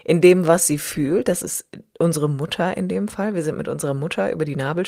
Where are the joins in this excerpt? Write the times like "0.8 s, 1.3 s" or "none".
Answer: none